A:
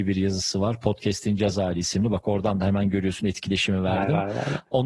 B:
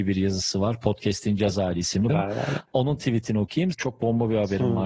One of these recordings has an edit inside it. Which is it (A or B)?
B